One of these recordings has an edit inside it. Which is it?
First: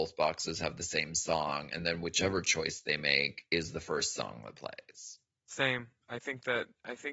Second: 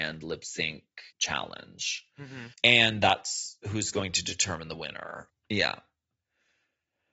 second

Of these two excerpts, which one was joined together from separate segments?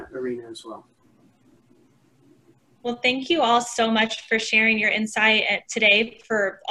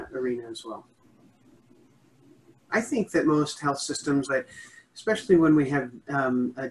second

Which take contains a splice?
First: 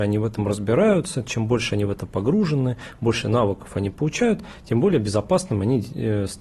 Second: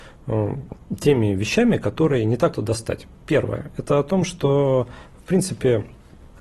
second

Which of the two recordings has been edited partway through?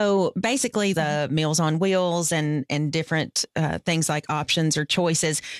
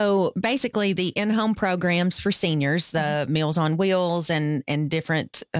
first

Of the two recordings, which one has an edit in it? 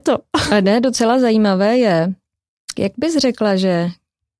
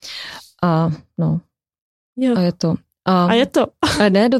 first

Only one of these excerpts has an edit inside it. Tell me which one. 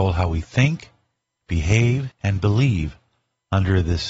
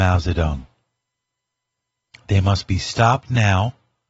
first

